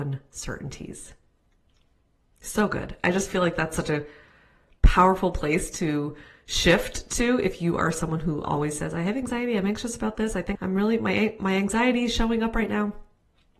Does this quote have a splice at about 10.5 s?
yes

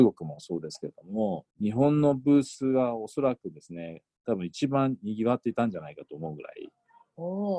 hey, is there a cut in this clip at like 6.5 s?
no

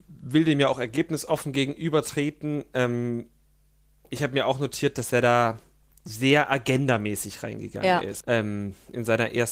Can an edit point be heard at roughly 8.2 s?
yes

